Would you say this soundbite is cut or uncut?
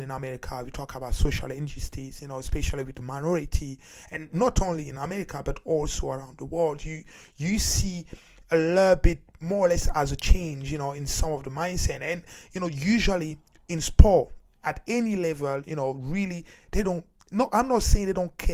uncut